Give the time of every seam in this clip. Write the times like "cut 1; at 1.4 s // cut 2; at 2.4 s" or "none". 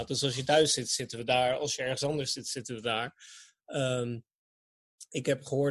none